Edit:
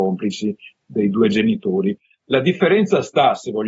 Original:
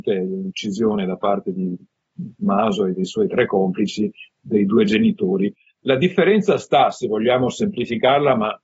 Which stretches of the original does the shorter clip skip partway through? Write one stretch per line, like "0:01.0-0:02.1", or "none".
none